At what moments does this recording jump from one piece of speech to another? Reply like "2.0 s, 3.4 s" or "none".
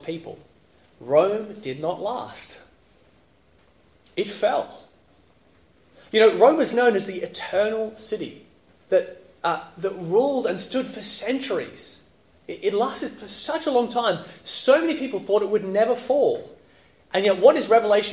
6.7 s, 8.9 s